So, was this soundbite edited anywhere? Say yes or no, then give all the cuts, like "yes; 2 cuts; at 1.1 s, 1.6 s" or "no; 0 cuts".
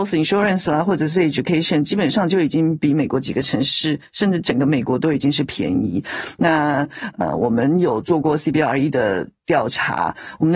no; 0 cuts